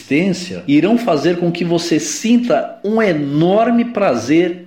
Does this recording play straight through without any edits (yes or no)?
yes